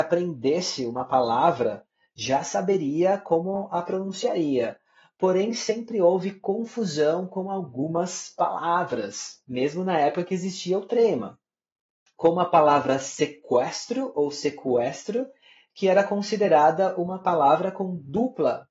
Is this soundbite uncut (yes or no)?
no